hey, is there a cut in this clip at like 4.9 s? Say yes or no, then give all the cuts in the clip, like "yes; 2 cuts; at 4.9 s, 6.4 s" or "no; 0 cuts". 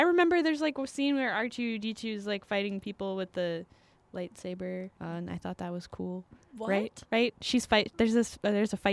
yes; 1 cut; at 4.9 s